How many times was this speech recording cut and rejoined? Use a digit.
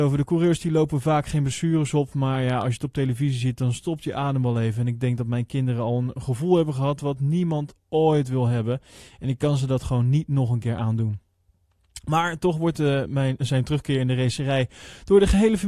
0